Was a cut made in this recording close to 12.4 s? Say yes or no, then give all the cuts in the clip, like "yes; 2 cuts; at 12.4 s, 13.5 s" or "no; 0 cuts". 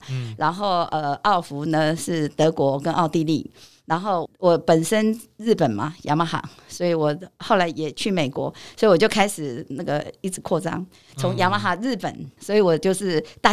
yes; 2 cuts; at 4.3 s, 12.4 s